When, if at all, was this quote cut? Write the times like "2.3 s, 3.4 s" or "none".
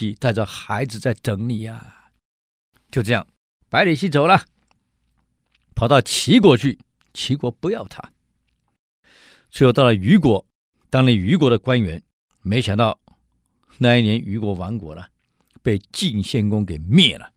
none